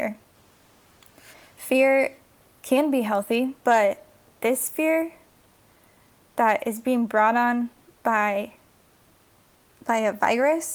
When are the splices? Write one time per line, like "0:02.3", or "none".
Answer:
0:03.6